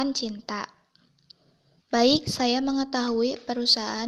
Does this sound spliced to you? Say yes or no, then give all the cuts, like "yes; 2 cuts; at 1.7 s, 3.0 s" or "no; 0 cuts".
yes; 1 cut; at 1.8 s